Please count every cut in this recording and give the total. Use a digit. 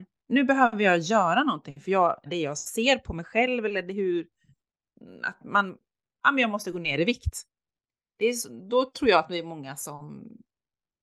1